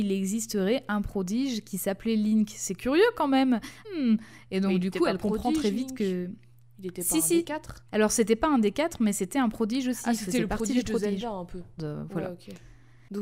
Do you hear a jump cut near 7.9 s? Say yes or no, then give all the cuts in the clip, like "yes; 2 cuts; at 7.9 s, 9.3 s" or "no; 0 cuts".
yes; 3 cuts; at 3.8 s, 7.9 s, 11.8 s